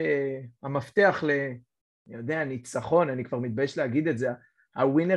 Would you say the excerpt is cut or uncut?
uncut